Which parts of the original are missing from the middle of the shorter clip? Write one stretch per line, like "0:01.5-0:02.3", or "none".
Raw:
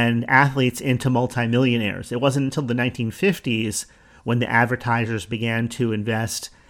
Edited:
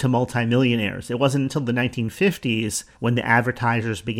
0:04.0-0:04.2